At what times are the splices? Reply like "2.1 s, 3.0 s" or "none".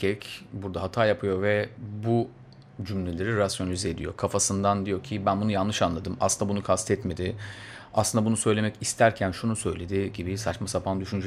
none